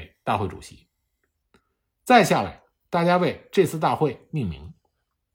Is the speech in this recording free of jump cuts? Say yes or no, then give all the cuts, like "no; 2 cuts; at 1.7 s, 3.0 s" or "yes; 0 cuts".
yes; 0 cuts